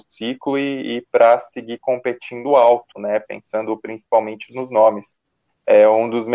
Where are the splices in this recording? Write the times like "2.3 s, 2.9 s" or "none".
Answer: none